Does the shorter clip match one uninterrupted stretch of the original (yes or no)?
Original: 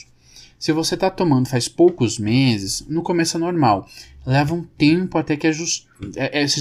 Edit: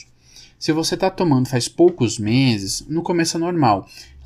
yes